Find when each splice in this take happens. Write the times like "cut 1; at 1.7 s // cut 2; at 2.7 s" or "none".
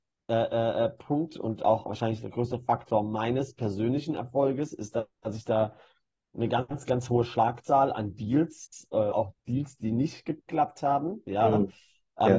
cut 1; at 9.1 s